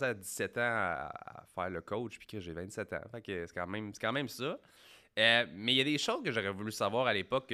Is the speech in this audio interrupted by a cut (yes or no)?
no